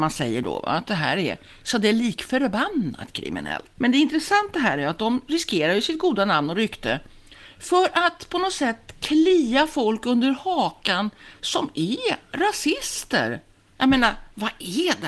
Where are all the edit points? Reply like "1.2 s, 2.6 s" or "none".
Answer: 3.8 s, 13.8 s